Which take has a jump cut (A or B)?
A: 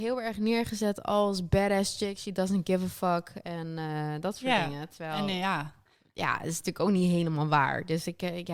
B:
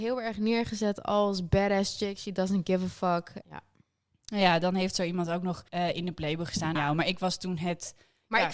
B